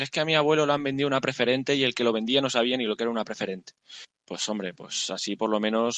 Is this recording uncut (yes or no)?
yes